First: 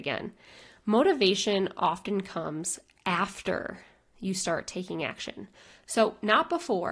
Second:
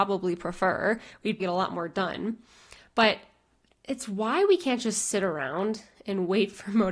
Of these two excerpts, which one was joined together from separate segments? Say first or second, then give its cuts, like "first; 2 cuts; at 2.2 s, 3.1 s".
second; 1 cut; at 1.4 s